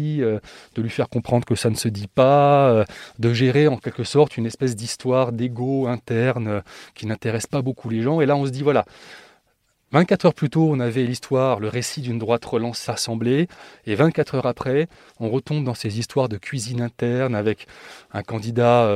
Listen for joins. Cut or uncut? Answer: cut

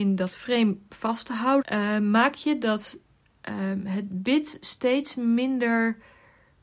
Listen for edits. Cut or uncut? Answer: cut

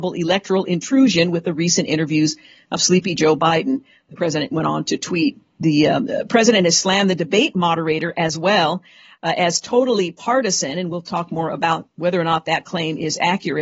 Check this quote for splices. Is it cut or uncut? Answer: uncut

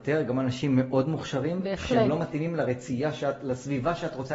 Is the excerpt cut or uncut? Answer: uncut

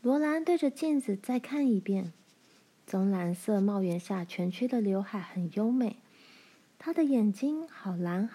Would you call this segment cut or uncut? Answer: cut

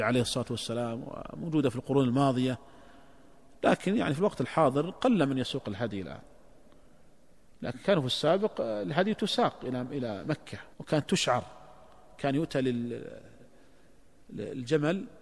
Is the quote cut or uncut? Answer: cut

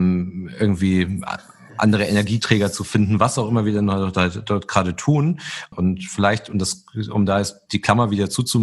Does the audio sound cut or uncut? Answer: cut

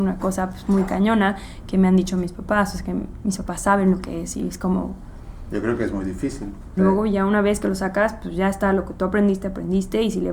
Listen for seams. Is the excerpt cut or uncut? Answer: cut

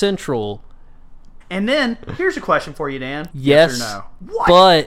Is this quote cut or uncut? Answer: cut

